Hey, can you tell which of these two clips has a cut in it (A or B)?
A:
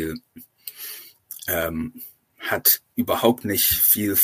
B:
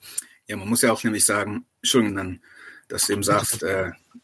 B